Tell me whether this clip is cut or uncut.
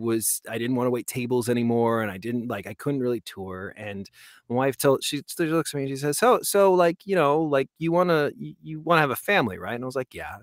uncut